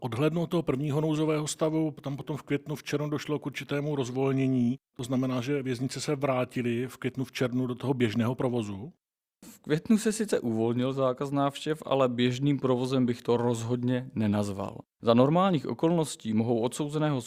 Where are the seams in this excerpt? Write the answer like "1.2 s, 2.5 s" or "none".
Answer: none